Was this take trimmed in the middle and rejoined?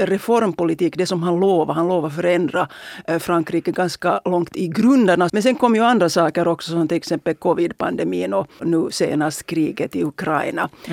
yes; 2 cuts; at 5.3 s, 8.6 s

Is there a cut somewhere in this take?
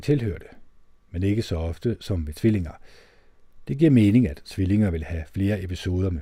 no; 0 cuts

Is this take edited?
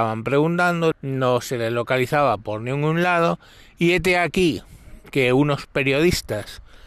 yes; 1 cut; at 0.9 s

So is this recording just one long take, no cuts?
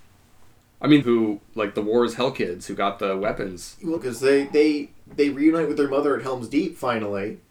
no; 2 cuts; at 1.0 s, 4.0 s

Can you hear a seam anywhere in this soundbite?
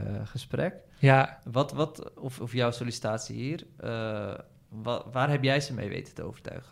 no; 0 cuts

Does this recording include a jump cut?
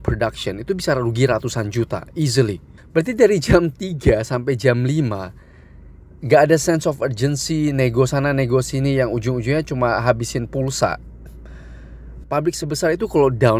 yes; 2 cuts; at 2.8 s, 12.2 s

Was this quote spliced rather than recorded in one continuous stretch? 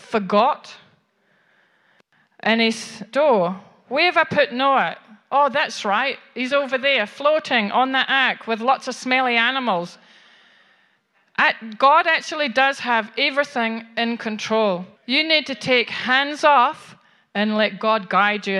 yes; 2 cuts; at 3.1 s, 15.0 s

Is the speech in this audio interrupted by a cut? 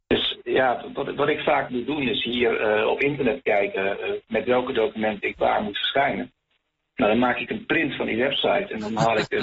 no; 0 cuts

